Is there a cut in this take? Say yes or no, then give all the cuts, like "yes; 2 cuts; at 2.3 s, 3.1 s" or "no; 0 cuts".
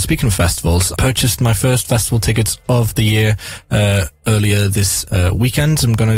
yes; 1 cut; at 1.0 s